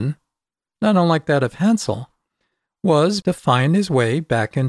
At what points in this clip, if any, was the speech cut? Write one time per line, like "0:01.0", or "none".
0:03.2